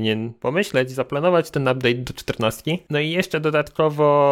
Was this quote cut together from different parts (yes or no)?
no